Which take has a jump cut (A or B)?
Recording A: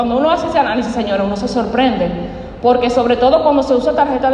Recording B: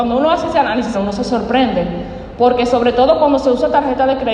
B